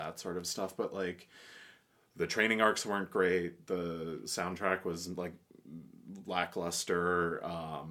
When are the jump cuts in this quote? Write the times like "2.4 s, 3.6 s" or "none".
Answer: none

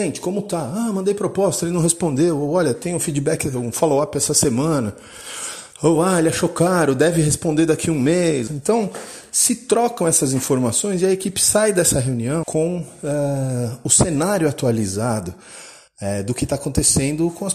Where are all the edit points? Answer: 8.5 s, 12.4 s

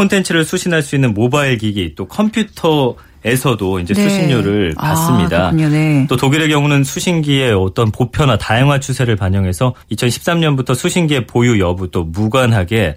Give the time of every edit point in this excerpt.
9.8 s

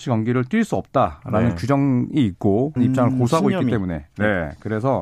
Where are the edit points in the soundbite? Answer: 2.8 s

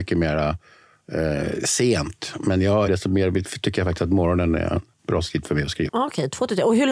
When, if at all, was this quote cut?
2.9 s, 5.9 s

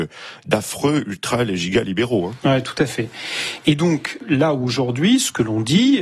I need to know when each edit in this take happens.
none

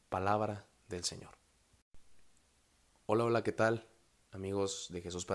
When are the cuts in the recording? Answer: none

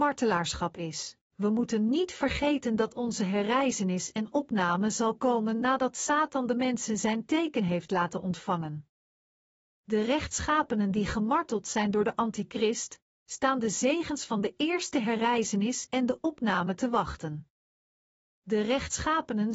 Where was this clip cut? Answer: 1.2 s

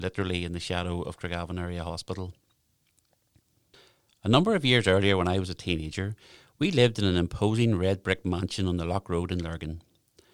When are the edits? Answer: none

